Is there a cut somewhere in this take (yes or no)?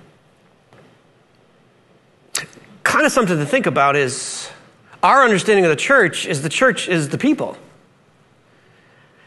no